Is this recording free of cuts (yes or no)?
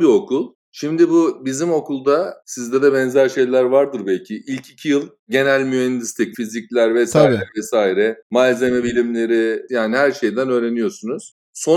no